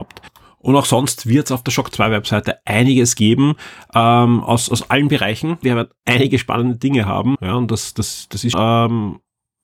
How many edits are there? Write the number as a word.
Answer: three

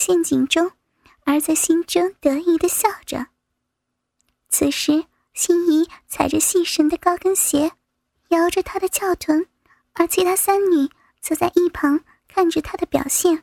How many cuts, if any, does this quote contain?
one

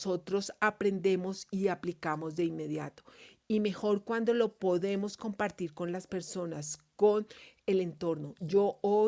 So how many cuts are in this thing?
zero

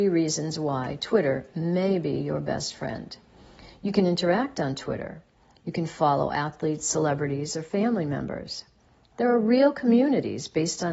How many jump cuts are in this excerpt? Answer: zero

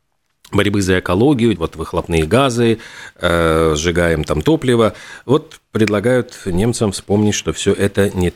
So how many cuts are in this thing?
one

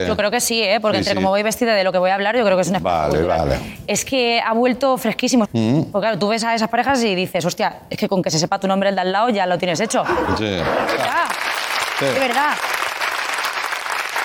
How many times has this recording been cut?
two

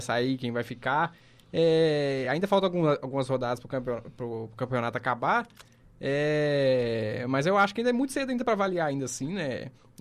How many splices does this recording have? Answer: zero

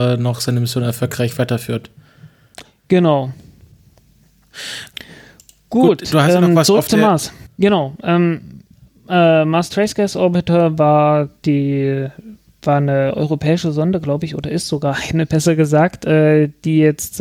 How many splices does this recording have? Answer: one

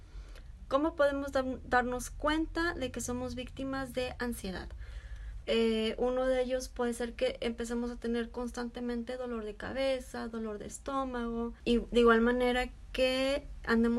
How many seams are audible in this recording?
one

